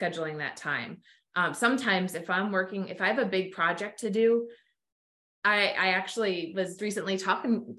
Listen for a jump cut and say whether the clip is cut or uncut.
cut